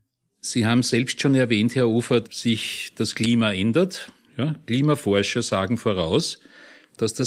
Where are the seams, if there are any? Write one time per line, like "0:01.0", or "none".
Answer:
0:02.2